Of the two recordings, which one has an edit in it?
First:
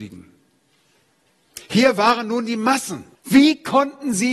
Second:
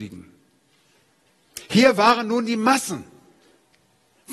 first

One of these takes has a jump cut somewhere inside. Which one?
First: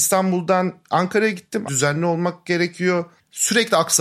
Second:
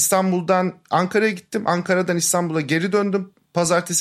first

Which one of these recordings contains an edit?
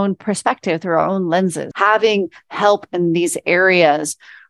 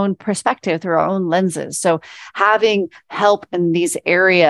first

